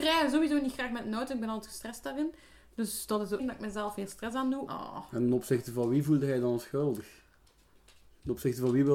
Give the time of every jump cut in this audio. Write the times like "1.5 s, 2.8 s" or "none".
3.4 s, 4.7 s